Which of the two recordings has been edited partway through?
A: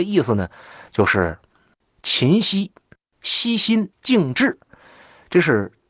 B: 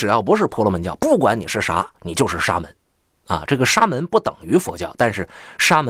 A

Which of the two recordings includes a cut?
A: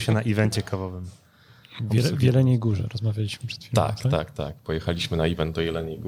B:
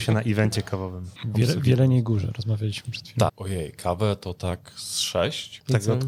B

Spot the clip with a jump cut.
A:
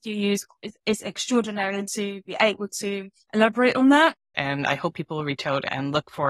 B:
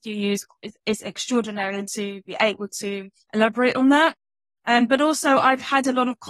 A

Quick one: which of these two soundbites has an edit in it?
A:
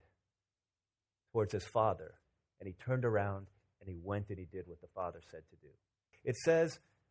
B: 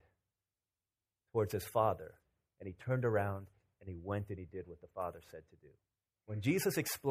A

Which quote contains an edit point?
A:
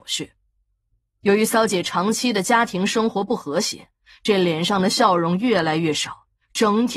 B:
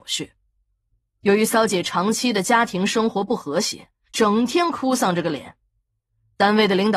B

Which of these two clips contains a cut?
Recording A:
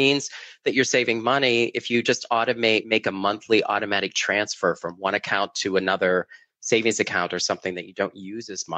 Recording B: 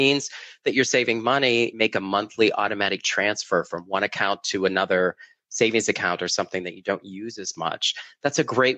B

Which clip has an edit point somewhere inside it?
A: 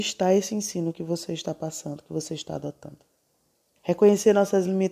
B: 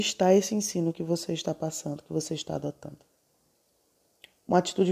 A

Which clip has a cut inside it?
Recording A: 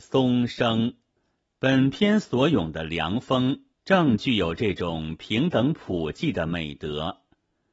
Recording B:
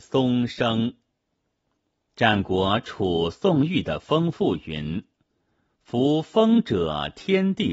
A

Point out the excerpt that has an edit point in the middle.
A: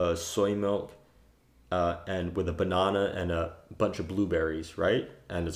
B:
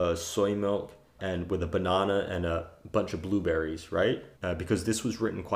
B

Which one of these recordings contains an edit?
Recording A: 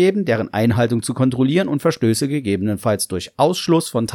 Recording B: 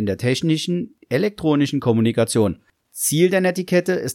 B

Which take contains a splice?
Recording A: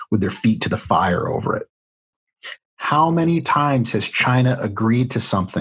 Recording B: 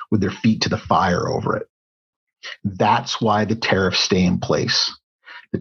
A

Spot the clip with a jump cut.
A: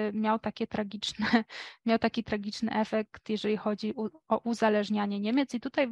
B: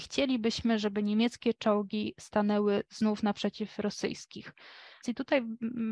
B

